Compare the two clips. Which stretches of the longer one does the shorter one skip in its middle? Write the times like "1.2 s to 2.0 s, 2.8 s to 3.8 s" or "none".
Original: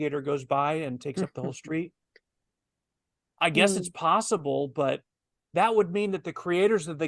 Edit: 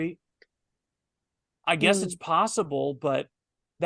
none